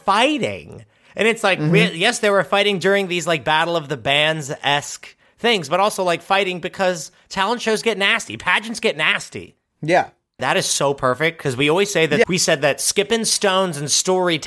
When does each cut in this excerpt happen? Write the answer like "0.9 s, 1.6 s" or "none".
10.4 s, 12.2 s